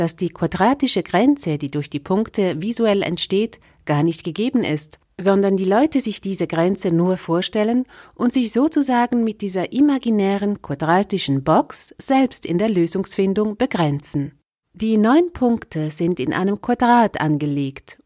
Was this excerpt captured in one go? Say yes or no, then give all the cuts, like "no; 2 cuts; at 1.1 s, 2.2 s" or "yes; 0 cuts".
no; 1 cut; at 14.6 s